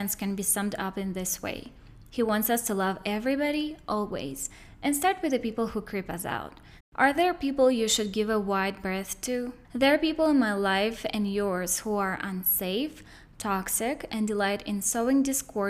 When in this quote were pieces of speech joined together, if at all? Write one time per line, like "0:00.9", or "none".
0:06.8
0:09.6